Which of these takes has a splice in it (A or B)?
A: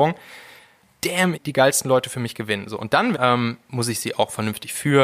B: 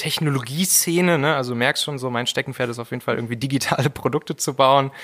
A